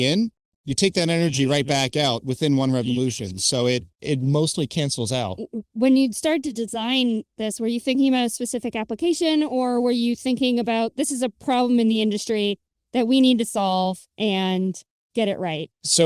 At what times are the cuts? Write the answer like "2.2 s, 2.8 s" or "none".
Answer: 3.9 s, 14.1 s